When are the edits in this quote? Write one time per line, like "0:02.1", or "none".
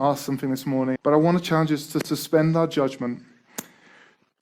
0:01.0